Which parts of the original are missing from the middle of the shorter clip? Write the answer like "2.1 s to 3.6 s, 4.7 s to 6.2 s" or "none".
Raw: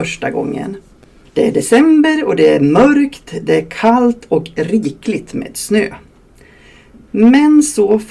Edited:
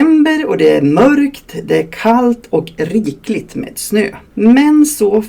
6.0 s to 7.0 s